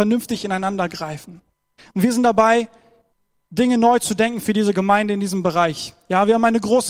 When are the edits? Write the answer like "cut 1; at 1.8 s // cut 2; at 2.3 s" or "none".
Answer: cut 1; at 1.8 s